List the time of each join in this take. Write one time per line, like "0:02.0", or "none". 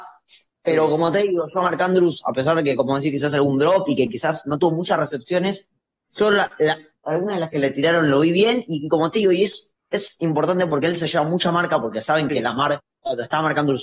none

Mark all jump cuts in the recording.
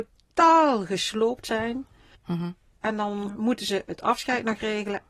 0:02.2

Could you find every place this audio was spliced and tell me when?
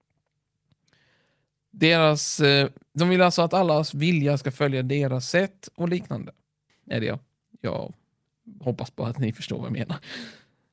0:06.7

